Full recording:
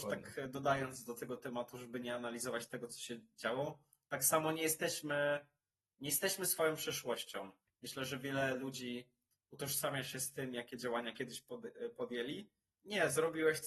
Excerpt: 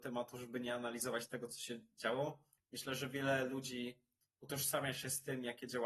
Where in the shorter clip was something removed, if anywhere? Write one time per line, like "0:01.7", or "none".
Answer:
0:02.6

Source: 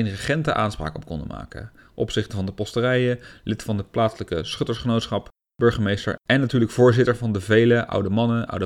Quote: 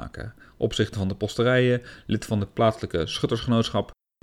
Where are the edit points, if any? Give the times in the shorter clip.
none

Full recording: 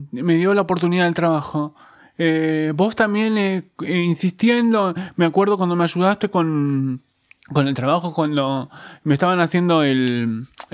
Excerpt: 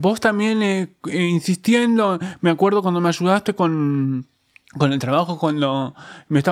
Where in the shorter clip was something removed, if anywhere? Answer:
none

